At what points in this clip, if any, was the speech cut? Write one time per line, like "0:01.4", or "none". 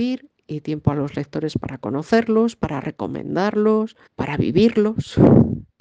0:02.6
0:04.1